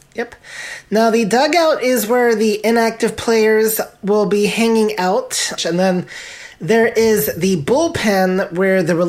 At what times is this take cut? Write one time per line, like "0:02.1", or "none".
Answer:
0:05.6